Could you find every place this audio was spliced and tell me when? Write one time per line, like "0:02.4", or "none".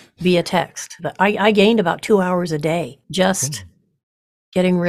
0:01.0
0:03.0